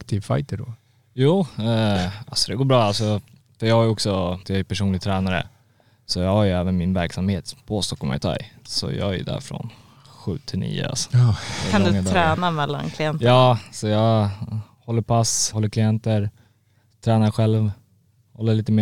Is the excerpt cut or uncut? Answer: cut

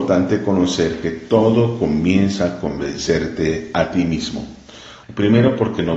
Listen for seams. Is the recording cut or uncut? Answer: cut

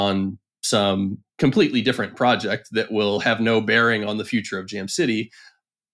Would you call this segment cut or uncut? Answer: uncut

